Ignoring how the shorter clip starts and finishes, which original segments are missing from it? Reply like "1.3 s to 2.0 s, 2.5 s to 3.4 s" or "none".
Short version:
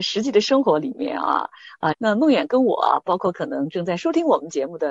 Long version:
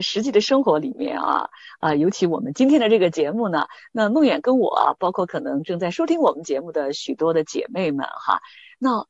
1.9 s to 3.9 s